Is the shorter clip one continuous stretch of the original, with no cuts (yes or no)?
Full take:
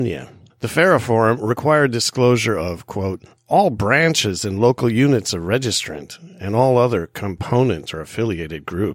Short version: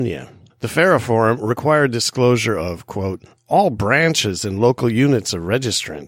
yes